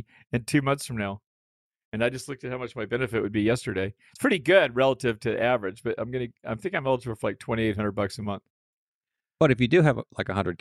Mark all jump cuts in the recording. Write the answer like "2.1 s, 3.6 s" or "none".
none